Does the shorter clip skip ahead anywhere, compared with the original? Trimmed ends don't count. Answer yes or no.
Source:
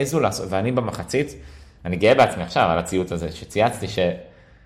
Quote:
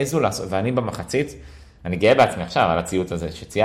no